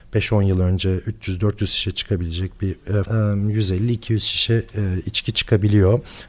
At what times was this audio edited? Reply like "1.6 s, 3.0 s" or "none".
3.1 s